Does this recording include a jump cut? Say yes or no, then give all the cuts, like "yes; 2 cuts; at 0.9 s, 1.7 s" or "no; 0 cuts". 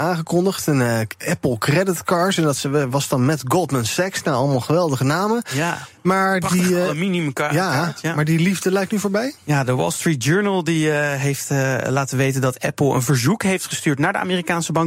no; 0 cuts